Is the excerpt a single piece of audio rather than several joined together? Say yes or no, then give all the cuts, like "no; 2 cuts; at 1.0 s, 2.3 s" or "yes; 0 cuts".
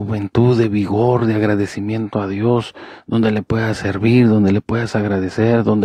yes; 0 cuts